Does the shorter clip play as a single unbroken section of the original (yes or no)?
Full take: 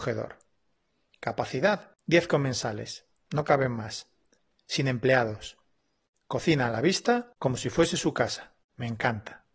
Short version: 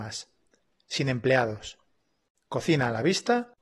yes